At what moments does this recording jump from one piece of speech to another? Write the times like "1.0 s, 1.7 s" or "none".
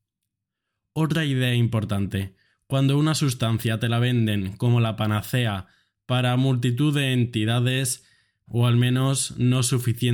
8.5 s